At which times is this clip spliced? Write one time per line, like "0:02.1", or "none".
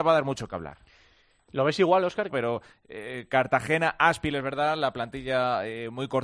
0:02.3

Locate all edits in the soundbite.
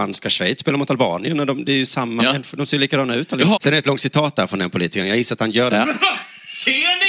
0:03.6
0:05.8

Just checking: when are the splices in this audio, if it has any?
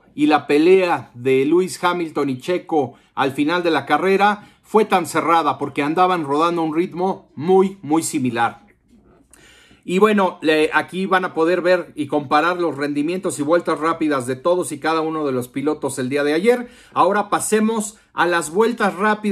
none

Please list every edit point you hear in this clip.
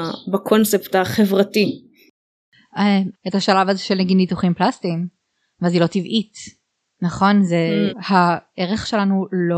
0:03.1
0:07.9

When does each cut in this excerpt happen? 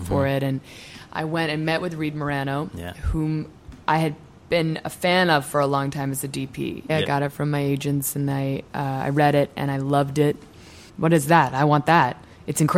0:06.9
0:10.9

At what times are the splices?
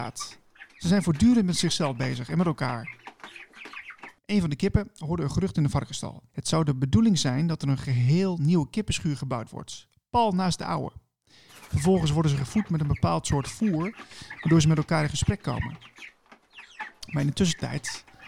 0:06.3
0:11.5

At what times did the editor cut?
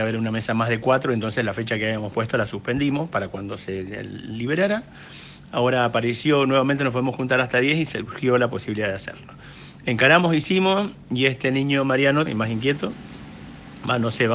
0:12.3

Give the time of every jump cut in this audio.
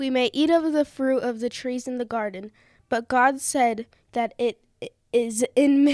0:04.0

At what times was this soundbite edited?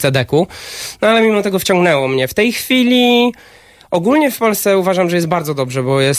none

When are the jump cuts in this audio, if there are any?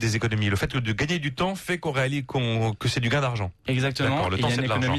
none

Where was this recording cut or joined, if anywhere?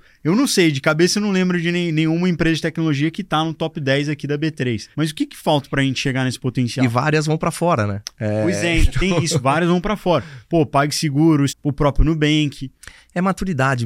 0:04.9
0:11.5

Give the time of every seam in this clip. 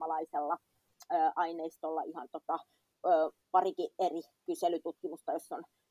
none

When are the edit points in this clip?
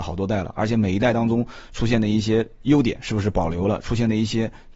none

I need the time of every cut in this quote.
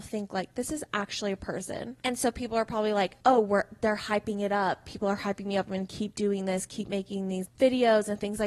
0:02.0
0:03.2
0:07.5

